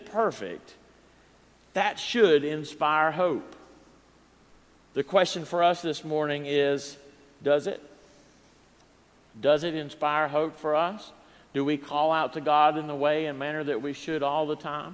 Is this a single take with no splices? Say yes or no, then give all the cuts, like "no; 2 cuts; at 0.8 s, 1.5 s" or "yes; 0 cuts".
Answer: yes; 0 cuts